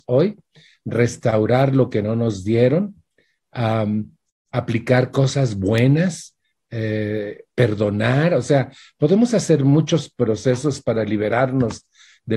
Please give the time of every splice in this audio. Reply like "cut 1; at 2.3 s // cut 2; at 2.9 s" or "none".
none